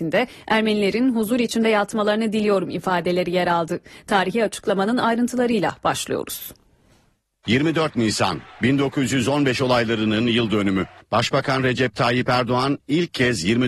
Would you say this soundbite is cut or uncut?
uncut